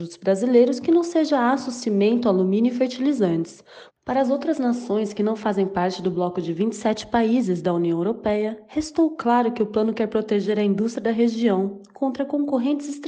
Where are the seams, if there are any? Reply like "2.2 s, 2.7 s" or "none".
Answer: 3.9 s